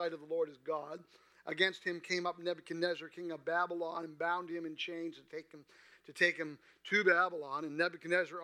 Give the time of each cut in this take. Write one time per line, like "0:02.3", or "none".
none